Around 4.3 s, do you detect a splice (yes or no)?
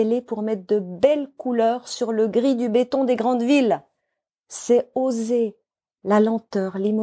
yes